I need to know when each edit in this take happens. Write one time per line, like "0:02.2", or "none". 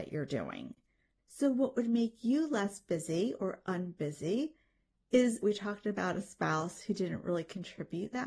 0:01.2
0:05.4